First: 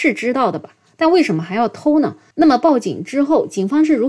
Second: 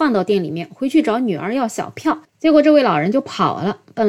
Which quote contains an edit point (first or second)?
first